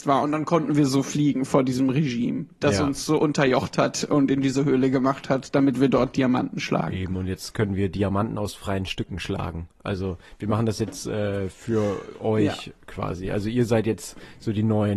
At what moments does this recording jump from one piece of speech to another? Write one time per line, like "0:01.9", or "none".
none